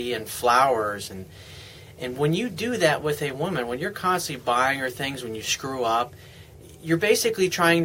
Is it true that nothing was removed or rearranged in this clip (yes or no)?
yes